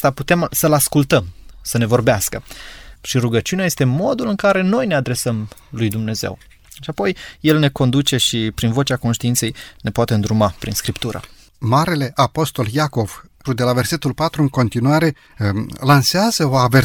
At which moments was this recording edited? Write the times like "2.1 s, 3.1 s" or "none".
3.0 s, 13.5 s